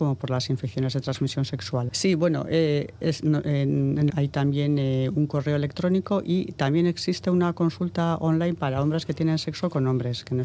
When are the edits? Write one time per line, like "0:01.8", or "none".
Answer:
0:01.9
0:04.1